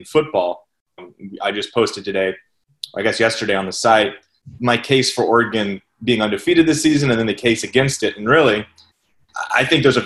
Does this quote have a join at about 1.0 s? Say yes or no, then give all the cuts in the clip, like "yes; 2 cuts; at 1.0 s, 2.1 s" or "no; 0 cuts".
yes; 2 cuts; at 1.0 s, 4.6 s